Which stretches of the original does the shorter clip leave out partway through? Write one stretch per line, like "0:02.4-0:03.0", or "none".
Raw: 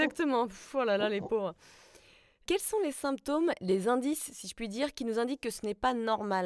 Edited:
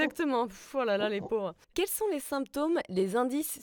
0:01.6-0:02.4